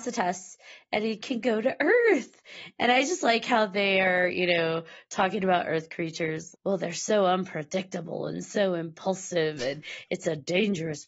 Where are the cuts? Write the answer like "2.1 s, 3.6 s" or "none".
6.5 s